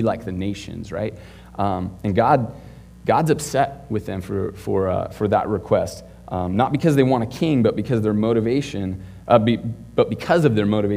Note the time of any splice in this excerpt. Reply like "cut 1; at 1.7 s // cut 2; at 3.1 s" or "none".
none